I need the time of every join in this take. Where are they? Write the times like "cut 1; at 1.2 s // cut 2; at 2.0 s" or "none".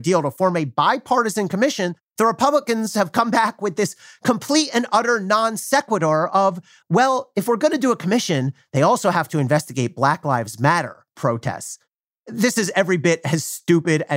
none